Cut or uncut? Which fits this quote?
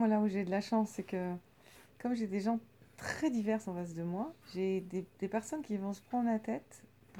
cut